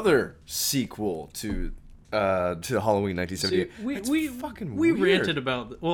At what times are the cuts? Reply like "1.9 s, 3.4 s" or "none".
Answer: 2.6 s